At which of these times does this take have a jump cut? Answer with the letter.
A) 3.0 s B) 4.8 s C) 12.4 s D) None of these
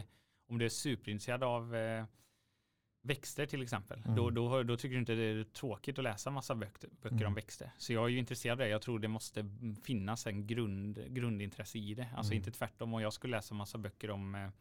A